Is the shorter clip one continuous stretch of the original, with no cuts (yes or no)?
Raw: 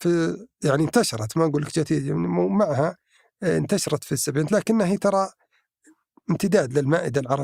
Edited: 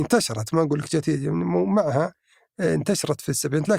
yes